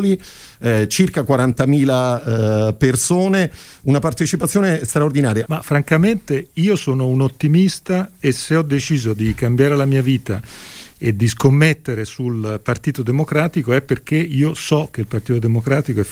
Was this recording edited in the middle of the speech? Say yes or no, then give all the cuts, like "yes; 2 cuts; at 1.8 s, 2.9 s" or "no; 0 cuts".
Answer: yes; 1 cut; at 5.5 s